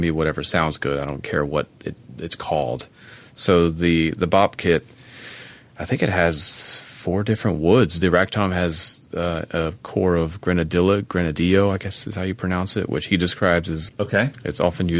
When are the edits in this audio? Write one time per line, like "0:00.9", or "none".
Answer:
0:13.9